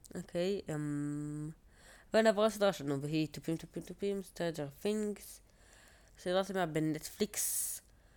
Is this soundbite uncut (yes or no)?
no